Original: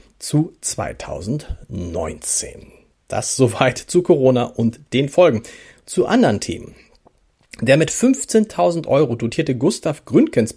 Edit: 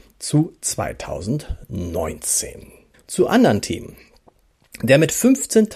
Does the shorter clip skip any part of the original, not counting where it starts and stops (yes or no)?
yes